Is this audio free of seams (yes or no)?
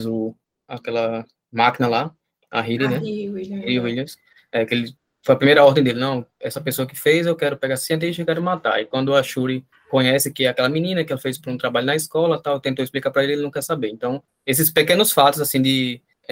yes